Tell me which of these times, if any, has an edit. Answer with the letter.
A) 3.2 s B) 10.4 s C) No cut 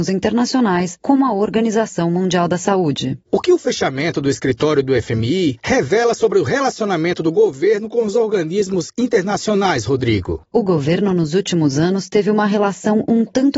B